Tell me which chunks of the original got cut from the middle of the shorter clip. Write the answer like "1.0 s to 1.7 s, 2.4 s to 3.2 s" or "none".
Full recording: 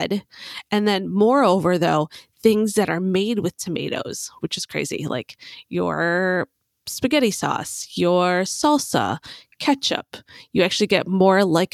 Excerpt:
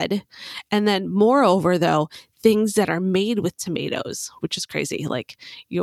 none